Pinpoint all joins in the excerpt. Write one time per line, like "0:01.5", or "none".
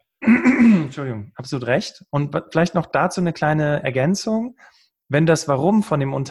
0:02.1